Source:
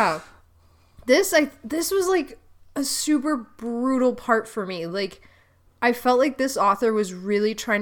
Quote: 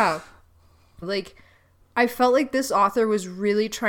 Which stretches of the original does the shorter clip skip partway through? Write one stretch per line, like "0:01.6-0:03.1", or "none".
0:01.0-0:04.9